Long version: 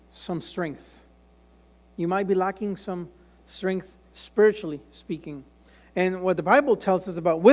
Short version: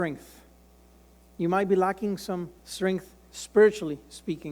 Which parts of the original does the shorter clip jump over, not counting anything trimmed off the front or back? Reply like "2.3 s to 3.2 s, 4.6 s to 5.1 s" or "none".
3.2 s to 3.4 s